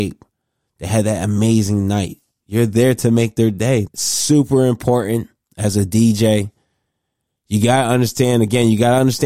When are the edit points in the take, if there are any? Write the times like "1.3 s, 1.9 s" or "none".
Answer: 3.9 s